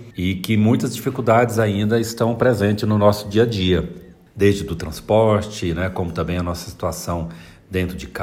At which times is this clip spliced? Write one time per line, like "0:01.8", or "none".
none